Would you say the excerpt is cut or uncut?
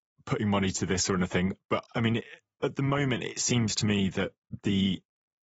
cut